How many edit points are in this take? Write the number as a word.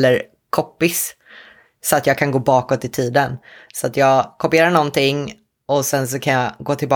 zero